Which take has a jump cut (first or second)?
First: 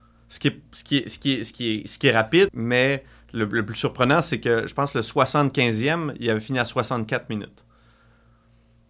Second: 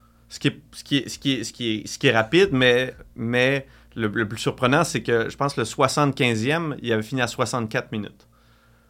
first